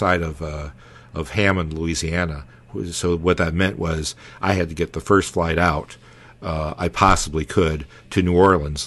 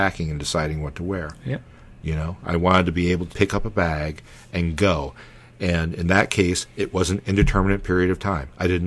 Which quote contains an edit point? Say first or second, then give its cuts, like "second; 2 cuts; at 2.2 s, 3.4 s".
second; 1 cut; at 3.3 s